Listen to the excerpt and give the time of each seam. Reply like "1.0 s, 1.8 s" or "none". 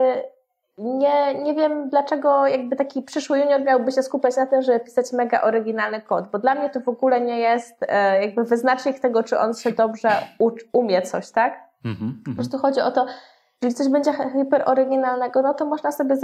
none